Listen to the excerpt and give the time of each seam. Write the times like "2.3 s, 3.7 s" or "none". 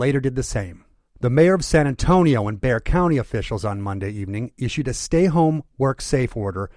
none